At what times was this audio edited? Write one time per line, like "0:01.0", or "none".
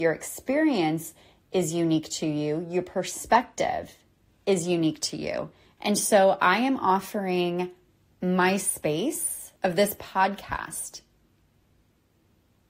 0:05.8
0:09.6